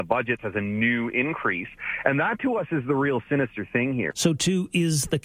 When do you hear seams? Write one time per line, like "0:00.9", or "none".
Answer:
0:04.1